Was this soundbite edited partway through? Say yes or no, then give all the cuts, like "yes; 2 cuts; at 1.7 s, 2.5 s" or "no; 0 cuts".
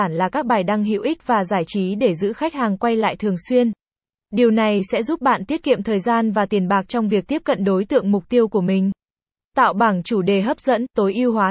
yes; 2 cuts; at 4.2 s, 9.4 s